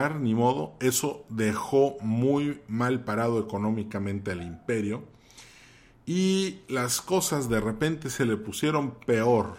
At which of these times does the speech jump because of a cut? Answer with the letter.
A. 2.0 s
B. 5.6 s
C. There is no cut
C